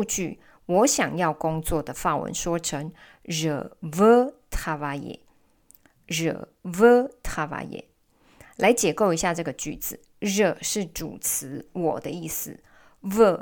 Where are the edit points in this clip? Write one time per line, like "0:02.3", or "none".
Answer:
none